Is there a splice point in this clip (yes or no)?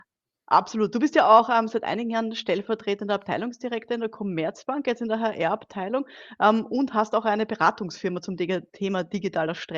no